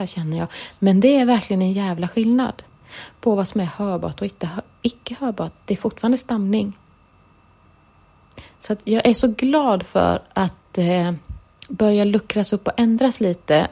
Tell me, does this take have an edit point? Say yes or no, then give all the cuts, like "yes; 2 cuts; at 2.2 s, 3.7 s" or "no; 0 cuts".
no; 0 cuts